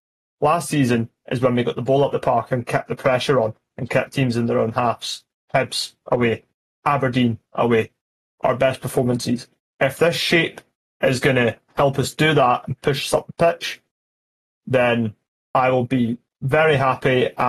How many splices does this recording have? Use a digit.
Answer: 0